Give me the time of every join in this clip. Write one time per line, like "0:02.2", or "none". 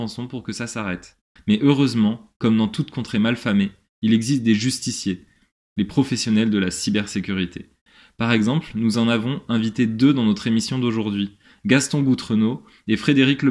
0:01.4